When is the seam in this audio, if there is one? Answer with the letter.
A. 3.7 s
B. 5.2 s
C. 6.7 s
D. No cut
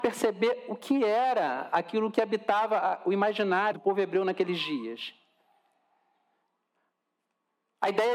A